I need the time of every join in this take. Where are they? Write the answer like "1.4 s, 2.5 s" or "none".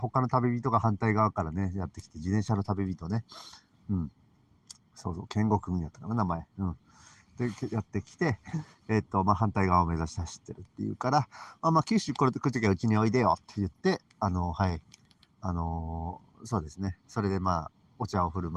none